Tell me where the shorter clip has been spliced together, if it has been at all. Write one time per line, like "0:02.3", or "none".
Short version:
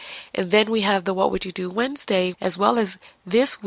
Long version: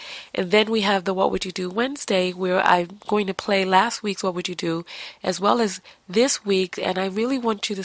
0:02.3